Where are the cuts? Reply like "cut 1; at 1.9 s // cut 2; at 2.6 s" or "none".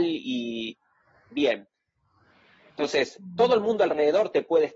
cut 1; at 2.7 s